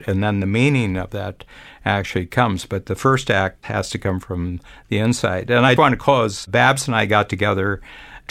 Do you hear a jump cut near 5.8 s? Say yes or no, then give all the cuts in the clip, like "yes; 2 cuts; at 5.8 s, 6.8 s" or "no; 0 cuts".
yes; 1 cut; at 5.8 s